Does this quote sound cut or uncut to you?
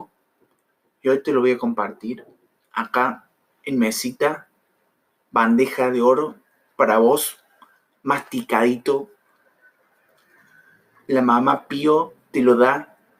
uncut